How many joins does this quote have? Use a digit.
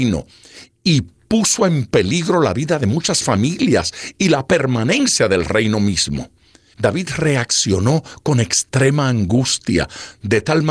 1